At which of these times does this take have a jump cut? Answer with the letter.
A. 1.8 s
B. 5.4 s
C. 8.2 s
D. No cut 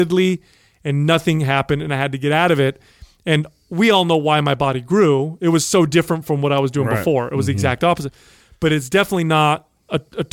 D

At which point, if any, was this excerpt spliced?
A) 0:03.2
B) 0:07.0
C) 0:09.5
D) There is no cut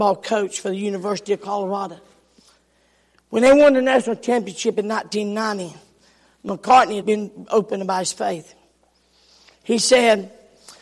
B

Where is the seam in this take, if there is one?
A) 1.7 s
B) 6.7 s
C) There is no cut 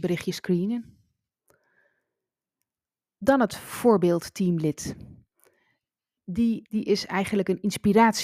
B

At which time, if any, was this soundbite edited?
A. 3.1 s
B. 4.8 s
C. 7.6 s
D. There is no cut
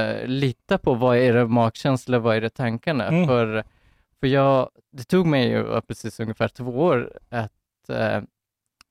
D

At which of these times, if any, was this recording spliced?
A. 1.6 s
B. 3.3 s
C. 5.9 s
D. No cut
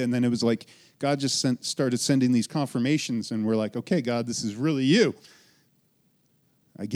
D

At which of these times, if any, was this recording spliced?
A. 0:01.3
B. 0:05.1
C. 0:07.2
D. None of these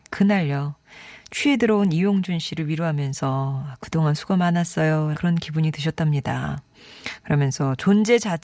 B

